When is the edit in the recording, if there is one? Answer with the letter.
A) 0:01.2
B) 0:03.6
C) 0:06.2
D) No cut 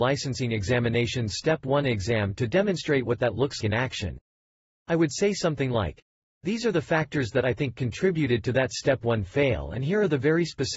B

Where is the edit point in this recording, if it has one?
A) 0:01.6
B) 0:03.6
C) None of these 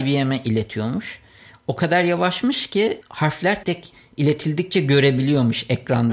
B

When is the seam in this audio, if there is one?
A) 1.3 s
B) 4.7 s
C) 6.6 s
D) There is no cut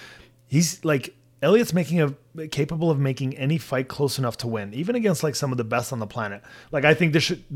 C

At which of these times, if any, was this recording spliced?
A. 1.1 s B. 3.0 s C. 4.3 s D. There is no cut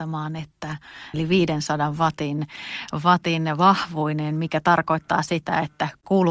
A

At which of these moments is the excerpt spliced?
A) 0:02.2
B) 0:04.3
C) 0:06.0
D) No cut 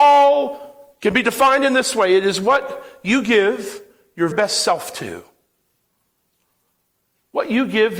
B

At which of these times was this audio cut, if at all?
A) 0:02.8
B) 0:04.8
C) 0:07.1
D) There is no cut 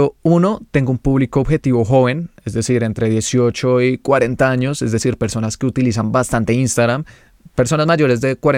D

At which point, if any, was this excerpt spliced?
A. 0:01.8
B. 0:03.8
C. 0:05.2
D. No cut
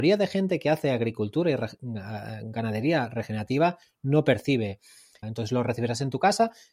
C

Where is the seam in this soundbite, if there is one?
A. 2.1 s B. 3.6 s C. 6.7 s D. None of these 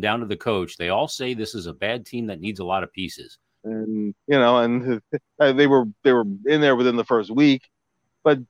B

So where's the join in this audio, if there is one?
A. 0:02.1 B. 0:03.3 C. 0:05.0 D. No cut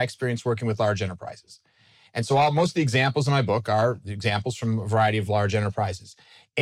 D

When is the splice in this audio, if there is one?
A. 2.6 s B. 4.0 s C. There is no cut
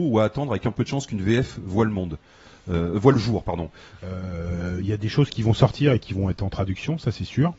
B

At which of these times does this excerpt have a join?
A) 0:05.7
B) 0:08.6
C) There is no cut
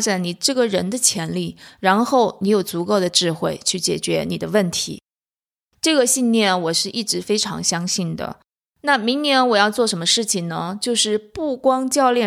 C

